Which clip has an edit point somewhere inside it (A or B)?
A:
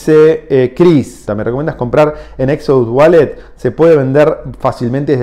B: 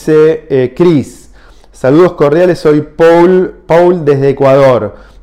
A